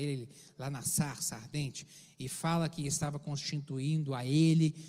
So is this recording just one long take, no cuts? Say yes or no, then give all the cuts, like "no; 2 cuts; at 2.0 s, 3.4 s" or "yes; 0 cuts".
yes; 0 cuts